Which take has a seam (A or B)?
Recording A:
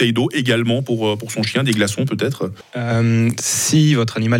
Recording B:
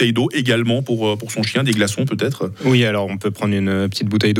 A